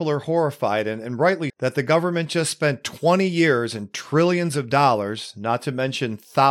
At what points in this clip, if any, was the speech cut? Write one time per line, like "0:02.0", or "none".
0:01.5